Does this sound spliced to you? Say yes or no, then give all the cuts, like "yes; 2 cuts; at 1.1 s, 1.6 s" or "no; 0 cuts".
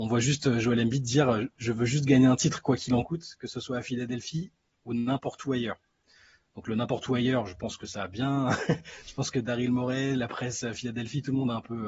no; 0 cuts